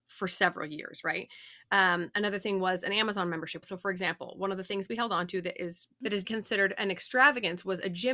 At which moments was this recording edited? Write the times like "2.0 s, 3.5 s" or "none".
1.6 s, 3.6 s, 6.2 s